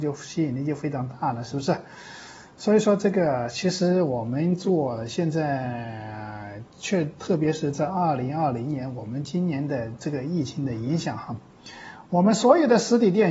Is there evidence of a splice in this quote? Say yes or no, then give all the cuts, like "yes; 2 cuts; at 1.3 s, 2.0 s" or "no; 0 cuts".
no; 0 cuts